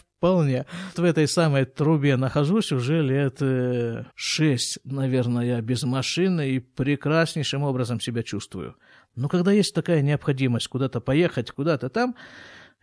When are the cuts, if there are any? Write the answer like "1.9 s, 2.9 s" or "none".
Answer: 0.9 s, 4.1 s, 11.5 s